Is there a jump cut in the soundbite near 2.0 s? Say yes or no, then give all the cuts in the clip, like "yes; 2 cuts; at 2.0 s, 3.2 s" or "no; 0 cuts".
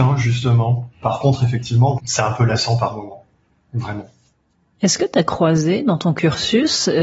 yes; 2 cuts; at 0.9 s, 2.0 s